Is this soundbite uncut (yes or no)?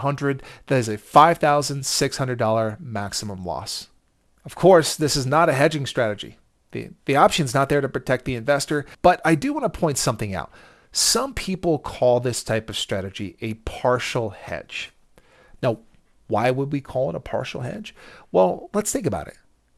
yes